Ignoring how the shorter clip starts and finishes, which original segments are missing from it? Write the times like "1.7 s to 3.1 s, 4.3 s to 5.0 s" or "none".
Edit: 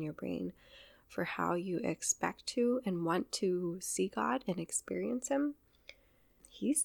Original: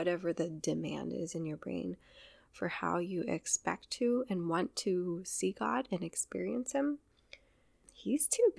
none